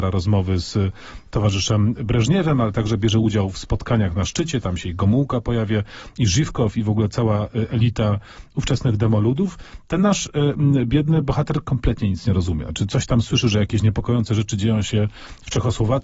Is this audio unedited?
yes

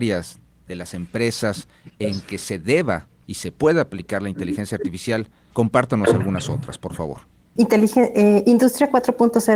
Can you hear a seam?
yes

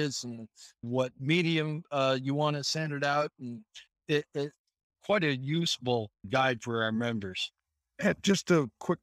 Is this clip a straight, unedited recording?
yes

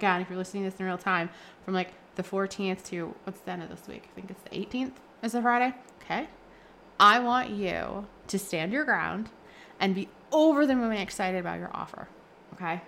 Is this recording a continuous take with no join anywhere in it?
no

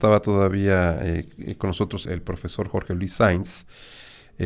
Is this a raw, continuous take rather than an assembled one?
no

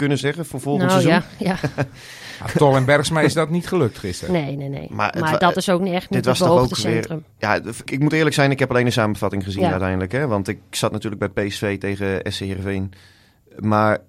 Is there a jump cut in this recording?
yes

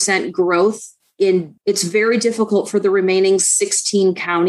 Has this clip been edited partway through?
yes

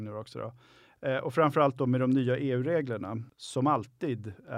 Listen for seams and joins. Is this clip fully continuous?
yes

